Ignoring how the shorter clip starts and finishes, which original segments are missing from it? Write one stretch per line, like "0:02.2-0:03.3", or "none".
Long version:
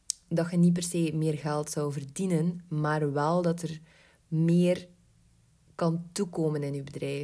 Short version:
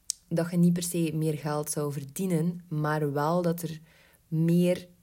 none